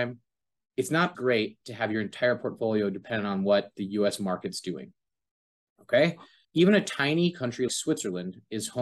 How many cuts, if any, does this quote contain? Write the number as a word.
three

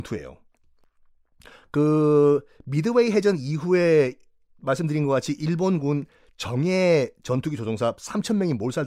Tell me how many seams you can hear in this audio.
zero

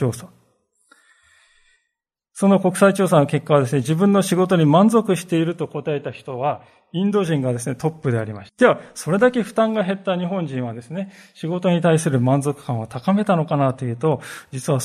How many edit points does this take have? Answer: one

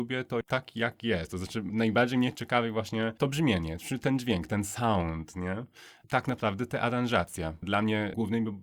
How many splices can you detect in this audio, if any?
zero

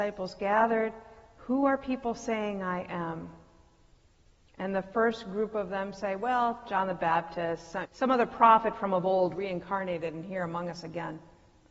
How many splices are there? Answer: one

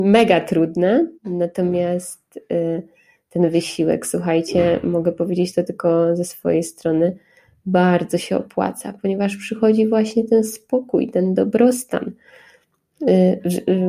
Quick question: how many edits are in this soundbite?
one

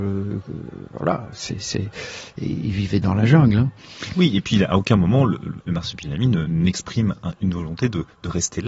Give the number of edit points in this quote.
one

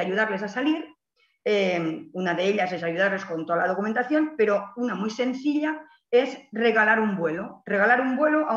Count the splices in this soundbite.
zero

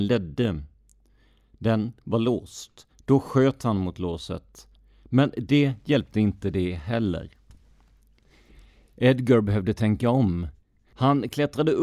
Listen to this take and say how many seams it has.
one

